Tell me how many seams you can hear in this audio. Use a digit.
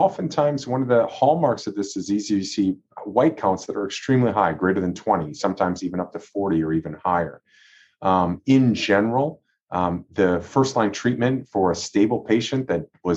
0